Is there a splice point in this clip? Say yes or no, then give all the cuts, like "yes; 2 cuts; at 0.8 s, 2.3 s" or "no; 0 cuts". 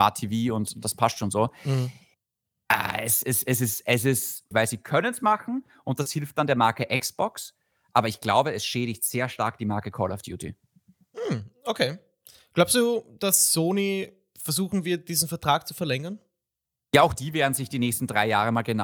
yes; 1 cut; at 4.5 s